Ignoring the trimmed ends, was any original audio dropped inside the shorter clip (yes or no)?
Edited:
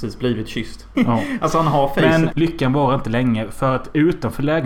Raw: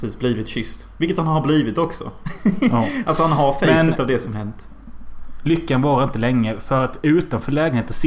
yes